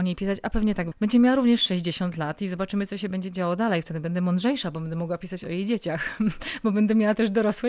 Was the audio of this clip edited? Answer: yes; 1 cut; at 0.9 s

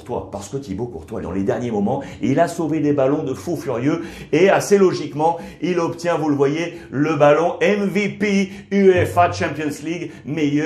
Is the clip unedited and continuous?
no; 1 cut; at 1.2 s

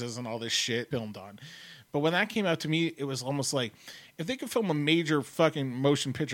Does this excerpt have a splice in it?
yes; 1 cut; at 0.9 s

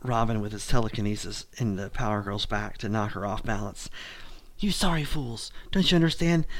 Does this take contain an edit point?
yes; 1 cut; at 4.5 s

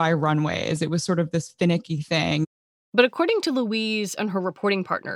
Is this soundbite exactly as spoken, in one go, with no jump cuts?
yes; 0 cuts

